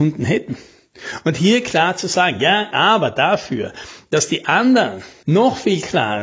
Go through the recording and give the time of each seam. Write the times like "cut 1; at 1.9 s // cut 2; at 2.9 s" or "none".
cut 1; at 2.7 s // cut 2; at 5.2 s